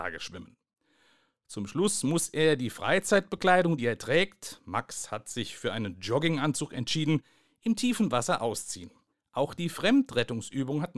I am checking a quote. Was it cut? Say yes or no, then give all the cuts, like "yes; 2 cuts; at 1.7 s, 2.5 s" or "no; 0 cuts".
no; 0 cuts